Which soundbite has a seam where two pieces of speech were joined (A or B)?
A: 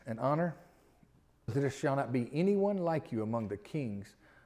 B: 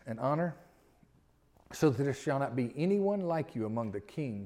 A